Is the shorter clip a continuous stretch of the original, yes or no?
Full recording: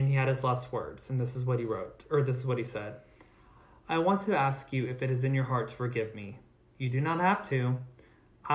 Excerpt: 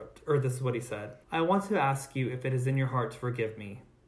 no